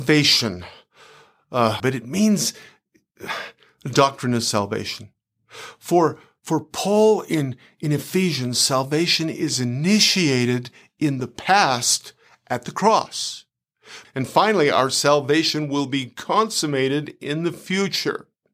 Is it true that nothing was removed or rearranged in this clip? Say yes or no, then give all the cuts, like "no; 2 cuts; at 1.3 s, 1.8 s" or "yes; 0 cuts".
no; 2 cuts; at 1.8 s, 14.0 s